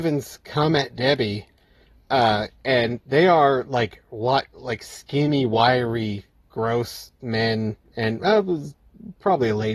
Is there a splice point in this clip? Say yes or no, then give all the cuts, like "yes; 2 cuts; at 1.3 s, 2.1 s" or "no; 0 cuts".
no; 0 cuts